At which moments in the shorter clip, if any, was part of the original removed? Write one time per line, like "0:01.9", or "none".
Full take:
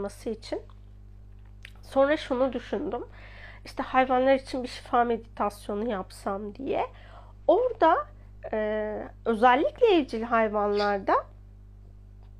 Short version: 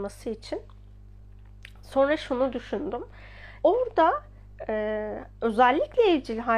0:03.6